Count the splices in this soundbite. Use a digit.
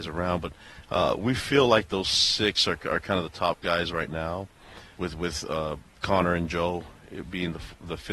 1